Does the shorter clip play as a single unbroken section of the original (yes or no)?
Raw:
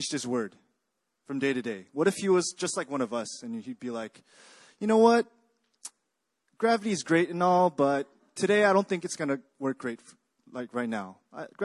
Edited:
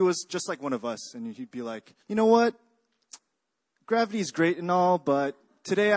no